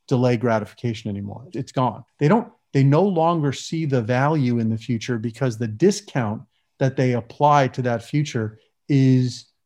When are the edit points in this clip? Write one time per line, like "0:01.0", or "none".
0:02.1

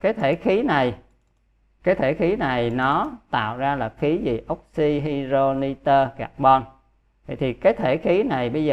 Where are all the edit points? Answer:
none

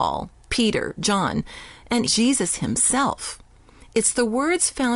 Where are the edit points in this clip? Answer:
0:02.1

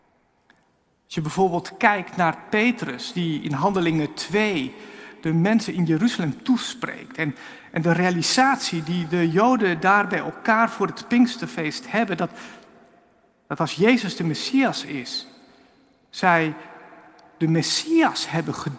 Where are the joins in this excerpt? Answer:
none

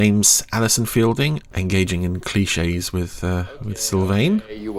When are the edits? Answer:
0:01.5

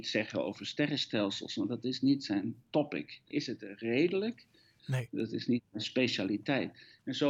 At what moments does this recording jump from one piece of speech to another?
0:03.3
0:04.8

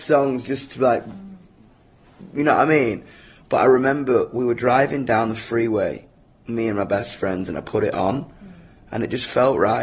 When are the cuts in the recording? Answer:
none

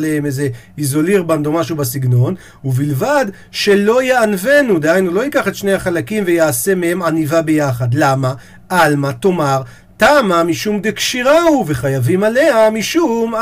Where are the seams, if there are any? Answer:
none

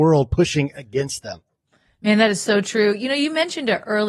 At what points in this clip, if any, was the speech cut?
none

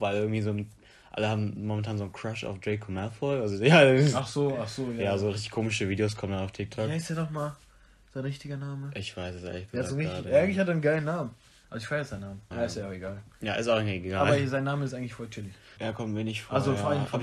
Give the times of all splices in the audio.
0:12.5
0:15.8

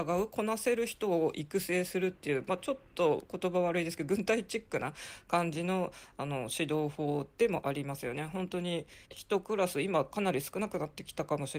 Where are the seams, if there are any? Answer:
0:09.0

